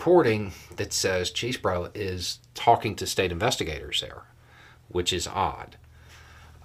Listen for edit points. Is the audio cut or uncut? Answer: uncut